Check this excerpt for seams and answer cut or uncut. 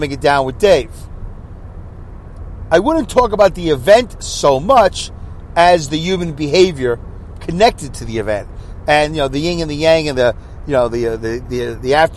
uncut